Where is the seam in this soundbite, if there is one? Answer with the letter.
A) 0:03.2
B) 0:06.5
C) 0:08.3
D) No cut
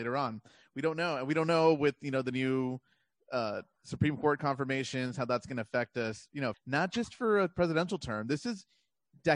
B